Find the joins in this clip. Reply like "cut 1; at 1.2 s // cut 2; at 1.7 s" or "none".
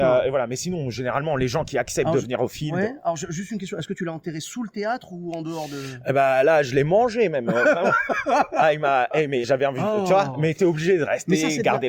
cut 1; at 9.4 s